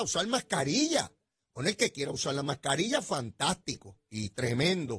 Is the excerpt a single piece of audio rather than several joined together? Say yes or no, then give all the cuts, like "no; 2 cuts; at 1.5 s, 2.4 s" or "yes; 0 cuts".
yes; 0 cuts